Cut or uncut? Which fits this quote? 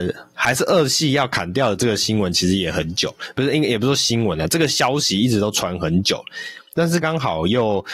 cut